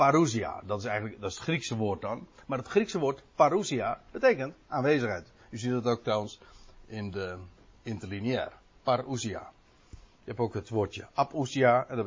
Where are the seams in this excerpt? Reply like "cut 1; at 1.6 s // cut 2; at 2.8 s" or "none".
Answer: none